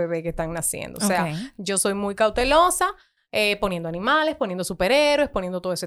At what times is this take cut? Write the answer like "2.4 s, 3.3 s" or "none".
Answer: none